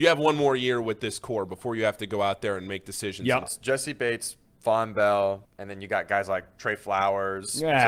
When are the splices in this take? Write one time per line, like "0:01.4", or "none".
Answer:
0:03.4
0:05.4